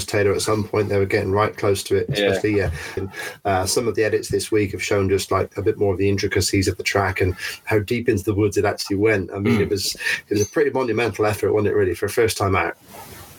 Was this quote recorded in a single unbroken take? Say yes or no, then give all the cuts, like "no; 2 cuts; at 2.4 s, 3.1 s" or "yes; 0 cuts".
no; 1 cut; at 3.0 s